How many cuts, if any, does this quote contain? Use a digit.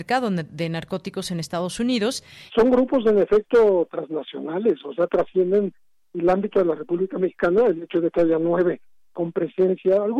1